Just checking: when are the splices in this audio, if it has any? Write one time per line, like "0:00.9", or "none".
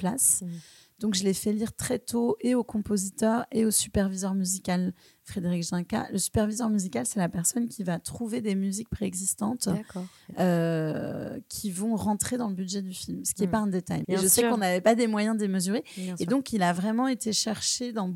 0:14.0